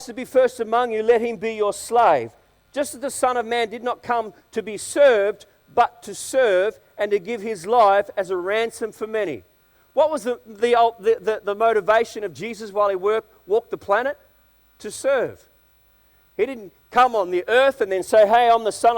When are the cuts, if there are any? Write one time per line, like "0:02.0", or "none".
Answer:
none